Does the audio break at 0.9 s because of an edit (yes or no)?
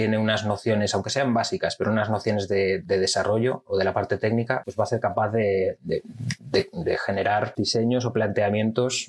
no